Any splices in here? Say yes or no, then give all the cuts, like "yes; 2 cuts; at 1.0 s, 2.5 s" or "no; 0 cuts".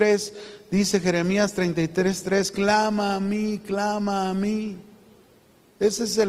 no; 0 cuts